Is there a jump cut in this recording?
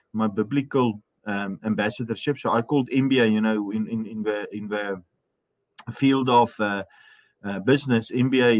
no; 0 cuts

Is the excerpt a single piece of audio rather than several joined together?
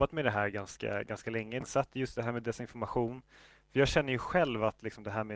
no; 1 cut; at 1.6 s

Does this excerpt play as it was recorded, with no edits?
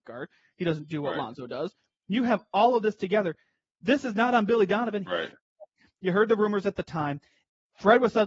no; 1 cut; at 5.0 s

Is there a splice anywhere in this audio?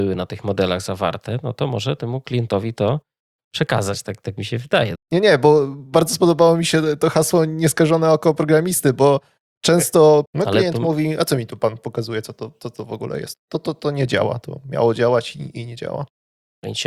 yes; 3 cuts; at 4.9 s, 10.2 s, 13.3 s

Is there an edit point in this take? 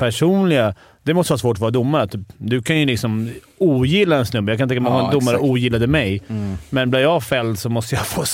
no; 0 cuts

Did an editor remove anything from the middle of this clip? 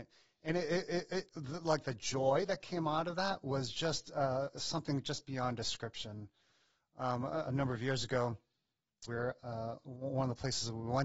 yes; 2 cuts; at 7.5 s, 9.1 s

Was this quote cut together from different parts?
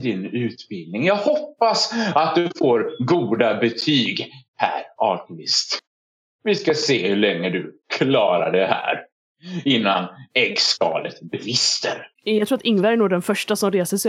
yes; 1 cut; at 12.2 s

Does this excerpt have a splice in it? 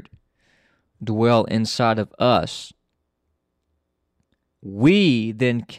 yes; 1 cut; at 4.5 s

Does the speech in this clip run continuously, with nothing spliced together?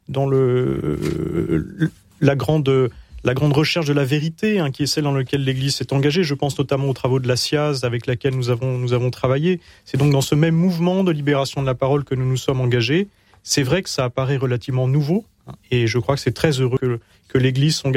yes; 0 cuts

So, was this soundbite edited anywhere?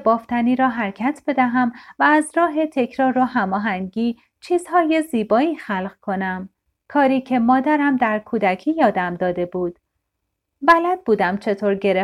yes; 1 cut; at 6.8 s

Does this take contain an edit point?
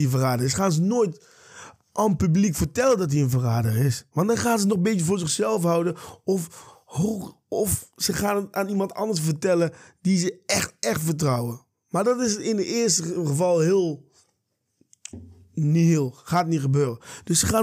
no; 0 cuts

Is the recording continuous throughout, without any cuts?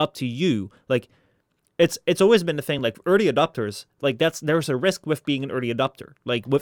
yes; 0 cuts

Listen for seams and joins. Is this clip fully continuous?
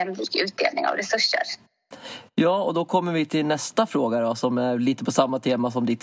yes; 0 cuts

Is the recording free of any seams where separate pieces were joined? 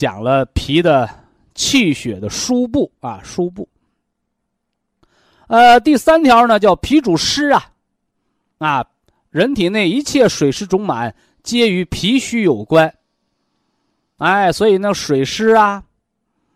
yes; 0 cuts

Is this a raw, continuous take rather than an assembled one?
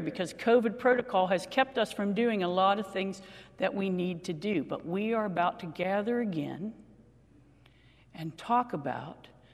yes; 0 cuts

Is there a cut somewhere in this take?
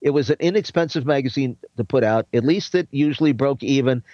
no; 0 cuts

